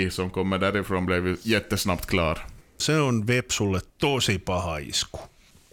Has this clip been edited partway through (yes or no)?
yes